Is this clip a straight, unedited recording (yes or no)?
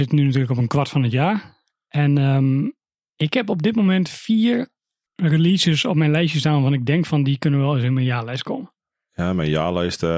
no